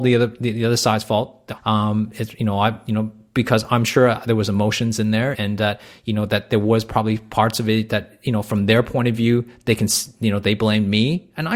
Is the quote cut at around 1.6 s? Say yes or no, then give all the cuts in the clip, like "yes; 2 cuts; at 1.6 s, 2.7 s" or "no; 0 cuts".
yes; 2 cuts; at 1.6 s, 5.3 s